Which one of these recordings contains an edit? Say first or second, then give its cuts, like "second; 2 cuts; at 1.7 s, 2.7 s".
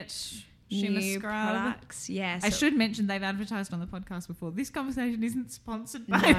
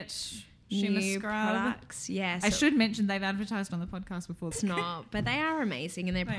second; 1 cut; at 4.5 s